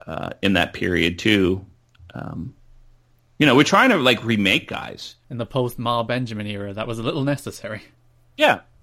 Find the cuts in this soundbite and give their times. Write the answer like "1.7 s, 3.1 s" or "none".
none